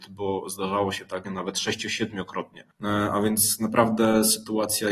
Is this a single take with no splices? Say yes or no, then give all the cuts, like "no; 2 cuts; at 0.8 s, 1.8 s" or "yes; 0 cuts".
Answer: no; 1 cut; at 1.2 s